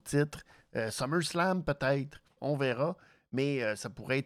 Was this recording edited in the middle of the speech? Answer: yes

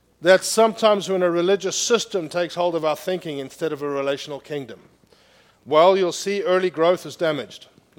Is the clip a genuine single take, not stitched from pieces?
yes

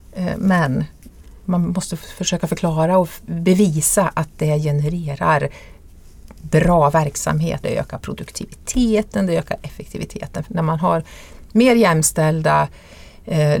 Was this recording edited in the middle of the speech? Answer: yes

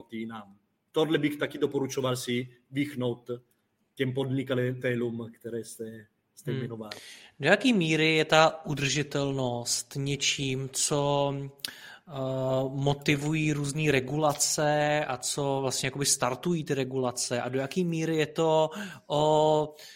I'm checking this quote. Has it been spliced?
no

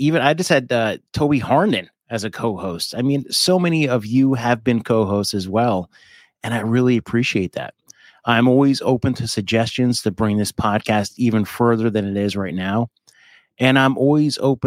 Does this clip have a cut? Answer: no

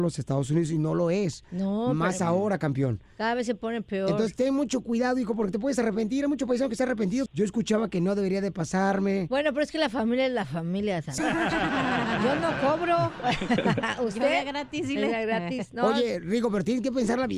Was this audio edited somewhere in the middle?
yes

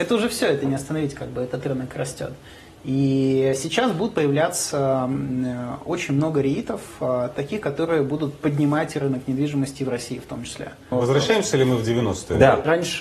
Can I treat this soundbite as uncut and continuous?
no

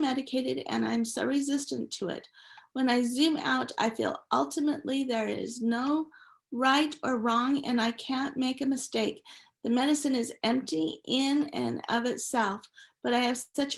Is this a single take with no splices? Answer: yes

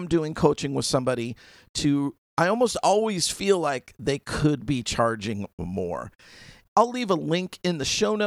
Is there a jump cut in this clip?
yes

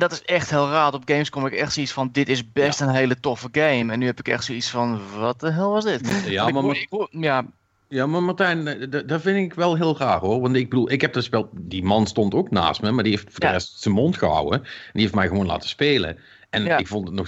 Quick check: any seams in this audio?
no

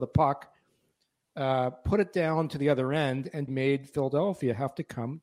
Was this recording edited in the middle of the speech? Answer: yes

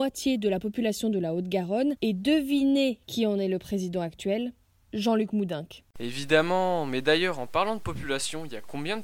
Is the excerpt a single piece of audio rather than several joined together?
yes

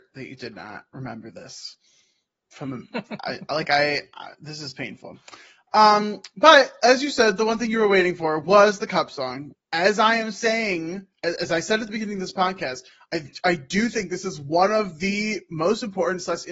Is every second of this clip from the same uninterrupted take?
no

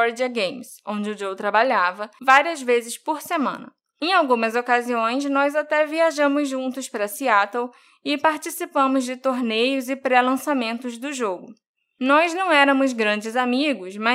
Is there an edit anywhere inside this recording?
no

